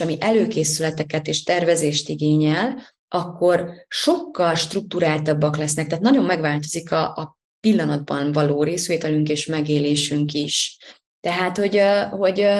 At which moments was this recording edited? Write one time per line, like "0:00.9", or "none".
0:11.2

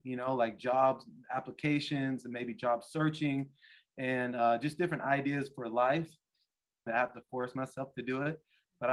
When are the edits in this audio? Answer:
0:01.2
0:06.9

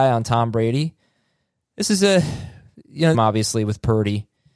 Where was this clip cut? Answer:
0:03.1

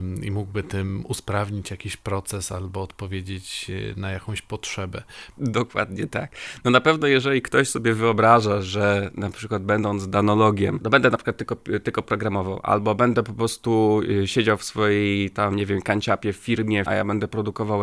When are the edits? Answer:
0:05.3
0:16.9

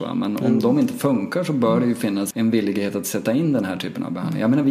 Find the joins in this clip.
0:02.3

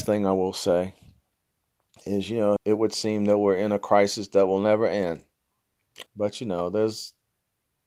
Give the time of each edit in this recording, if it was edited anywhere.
0:02.6
0:06.1

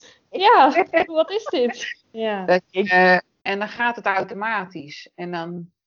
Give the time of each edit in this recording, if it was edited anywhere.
0:02.0
0:03.4

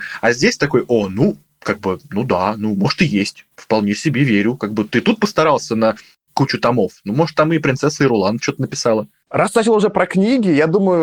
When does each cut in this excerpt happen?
none

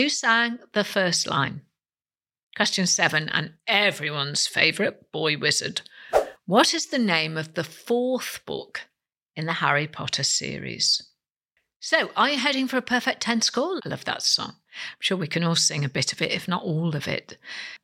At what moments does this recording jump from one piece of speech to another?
0:13.8

